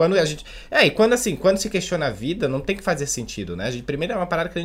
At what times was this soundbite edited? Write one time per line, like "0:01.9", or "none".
none